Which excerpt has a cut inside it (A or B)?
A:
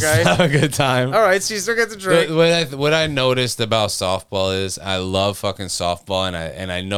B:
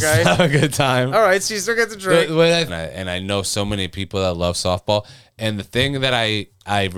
B